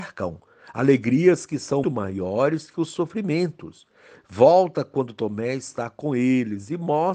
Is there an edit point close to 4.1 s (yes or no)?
yes